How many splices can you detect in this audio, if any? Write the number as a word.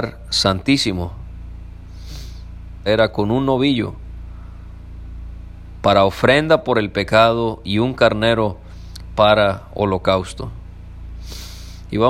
one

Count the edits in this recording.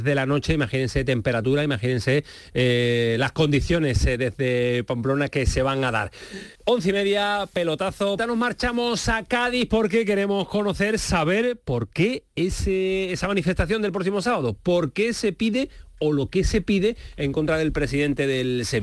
two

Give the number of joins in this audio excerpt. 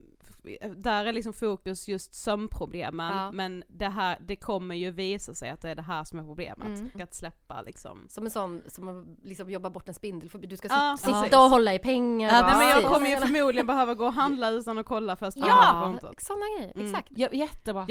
one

